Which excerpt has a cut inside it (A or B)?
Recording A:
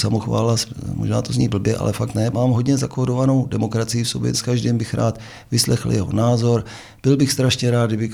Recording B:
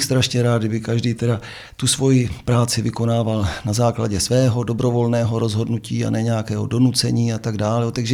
A